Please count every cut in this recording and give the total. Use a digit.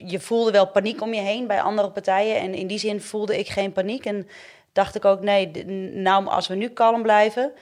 0